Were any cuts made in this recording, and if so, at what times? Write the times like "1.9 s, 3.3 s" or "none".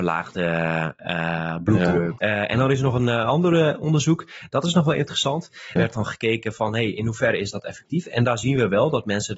2.2 s, 5.8 s